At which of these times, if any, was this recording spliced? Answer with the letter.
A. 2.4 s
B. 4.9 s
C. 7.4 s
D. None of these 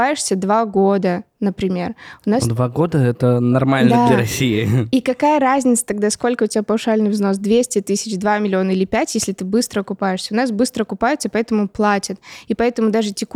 D